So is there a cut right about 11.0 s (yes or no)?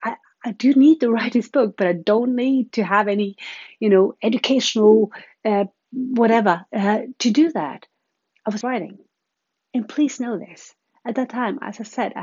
no